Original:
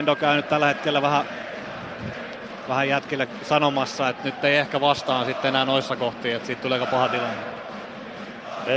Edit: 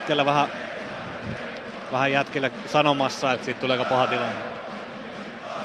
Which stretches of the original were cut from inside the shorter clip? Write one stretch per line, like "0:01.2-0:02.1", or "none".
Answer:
0:04.1-0:06.4